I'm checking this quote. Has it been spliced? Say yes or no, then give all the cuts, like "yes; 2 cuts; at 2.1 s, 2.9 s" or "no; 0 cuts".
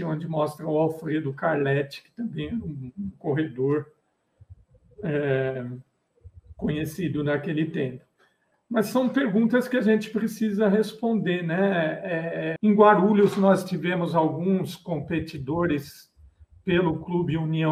yes; 1 cut; at 12.6 s